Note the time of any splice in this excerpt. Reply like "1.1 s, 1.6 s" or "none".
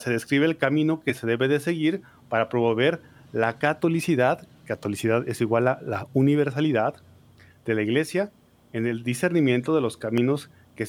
none